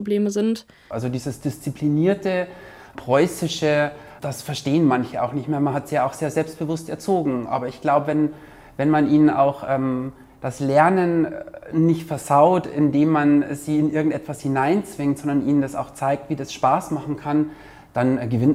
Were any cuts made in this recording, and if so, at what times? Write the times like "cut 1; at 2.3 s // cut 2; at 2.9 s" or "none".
cut 1; at 0.9 s